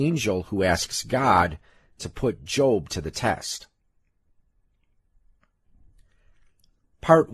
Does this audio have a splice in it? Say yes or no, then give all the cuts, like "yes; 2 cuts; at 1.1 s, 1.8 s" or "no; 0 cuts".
no; 0 cuts